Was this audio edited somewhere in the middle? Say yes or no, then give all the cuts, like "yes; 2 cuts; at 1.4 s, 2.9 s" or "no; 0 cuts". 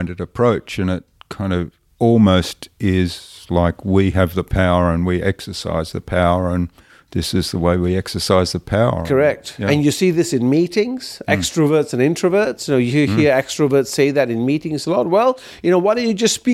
no; 0 cuts